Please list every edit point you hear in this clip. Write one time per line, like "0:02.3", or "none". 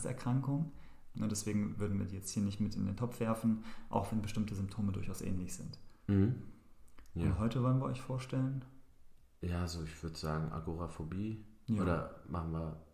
0:01.1